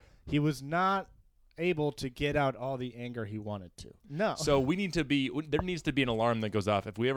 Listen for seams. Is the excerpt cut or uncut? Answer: cut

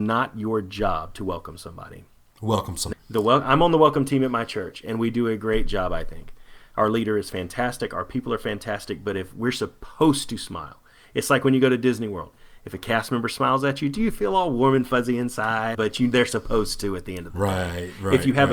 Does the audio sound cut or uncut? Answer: cut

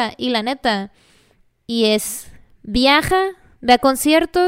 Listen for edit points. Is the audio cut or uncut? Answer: cut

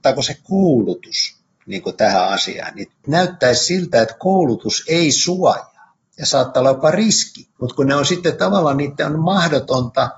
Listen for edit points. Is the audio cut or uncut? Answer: cut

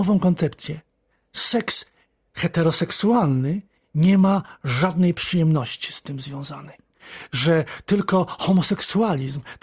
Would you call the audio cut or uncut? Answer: uncut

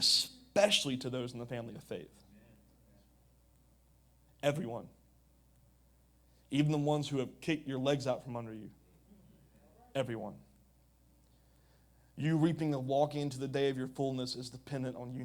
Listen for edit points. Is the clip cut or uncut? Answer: uncut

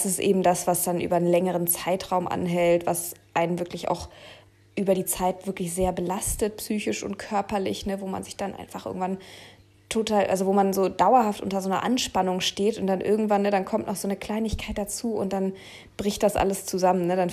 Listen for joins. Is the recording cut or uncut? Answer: uncut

